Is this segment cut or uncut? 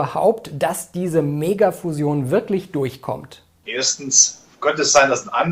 cut